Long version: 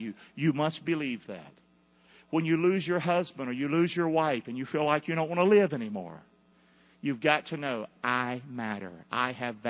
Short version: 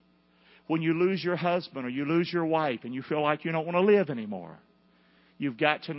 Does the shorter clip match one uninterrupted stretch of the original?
yes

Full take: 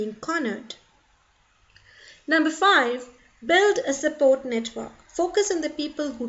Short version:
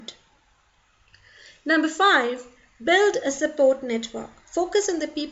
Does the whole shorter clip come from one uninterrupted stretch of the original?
yes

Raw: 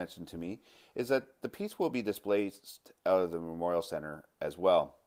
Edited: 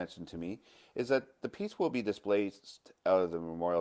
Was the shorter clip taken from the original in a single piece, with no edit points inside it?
yes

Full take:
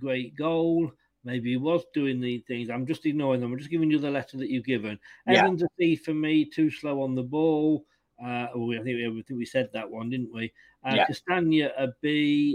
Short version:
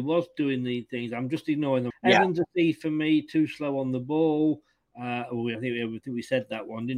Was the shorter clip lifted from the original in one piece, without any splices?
no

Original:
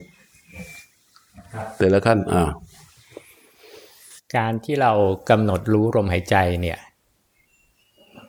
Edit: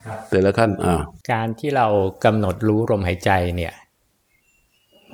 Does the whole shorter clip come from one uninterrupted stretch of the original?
no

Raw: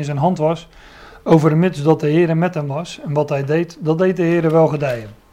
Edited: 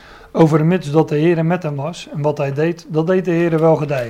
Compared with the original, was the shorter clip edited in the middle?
no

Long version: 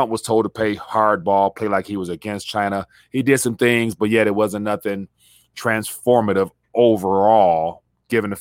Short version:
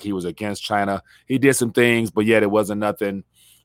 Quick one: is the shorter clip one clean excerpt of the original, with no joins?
yes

